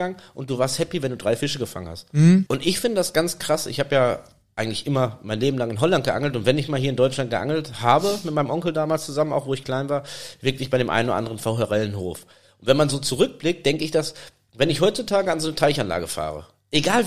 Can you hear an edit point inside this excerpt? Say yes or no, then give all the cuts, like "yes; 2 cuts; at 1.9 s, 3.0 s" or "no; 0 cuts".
yes; 1 cut; at 2.5 s